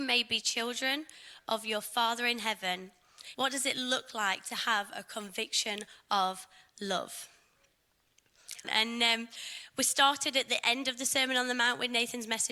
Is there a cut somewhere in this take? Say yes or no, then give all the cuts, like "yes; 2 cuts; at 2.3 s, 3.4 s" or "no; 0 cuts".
yes; 2 cuts; at 3.3 s, 8.6 s